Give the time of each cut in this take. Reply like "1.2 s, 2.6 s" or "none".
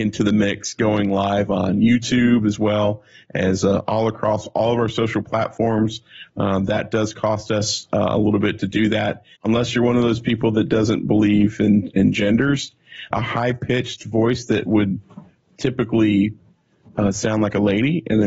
9.4 s, 13.1 s